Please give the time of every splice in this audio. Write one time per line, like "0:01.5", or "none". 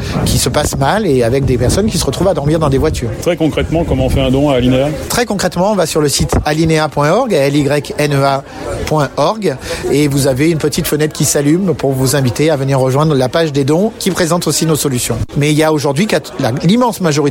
0:15.3